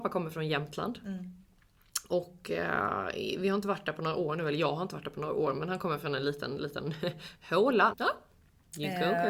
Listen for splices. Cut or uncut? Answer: cut